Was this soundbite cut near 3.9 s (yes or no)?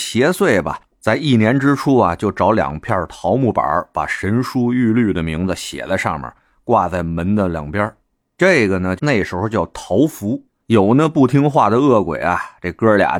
no